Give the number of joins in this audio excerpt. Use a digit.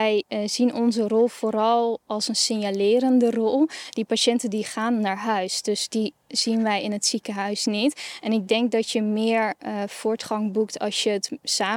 0